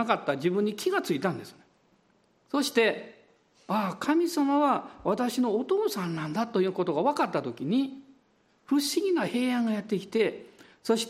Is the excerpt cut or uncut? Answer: uncut